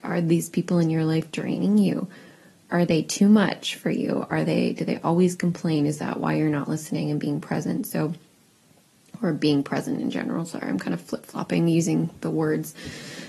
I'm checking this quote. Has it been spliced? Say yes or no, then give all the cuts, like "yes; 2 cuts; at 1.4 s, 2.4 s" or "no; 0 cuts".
no; 0 cuts